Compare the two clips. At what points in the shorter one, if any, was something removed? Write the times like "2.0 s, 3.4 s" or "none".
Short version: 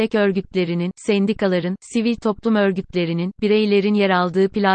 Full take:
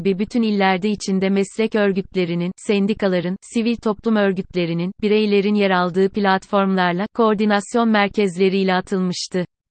none